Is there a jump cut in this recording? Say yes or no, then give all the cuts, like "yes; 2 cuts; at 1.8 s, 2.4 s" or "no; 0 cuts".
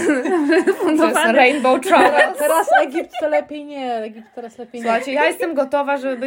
no; 0 cuts